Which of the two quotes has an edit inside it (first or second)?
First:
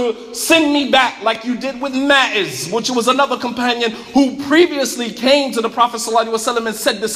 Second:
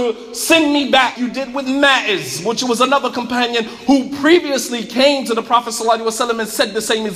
second